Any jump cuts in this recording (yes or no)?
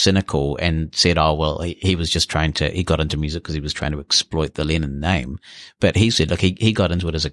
no